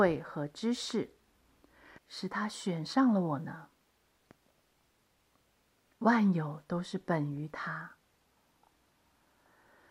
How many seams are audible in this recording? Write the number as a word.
one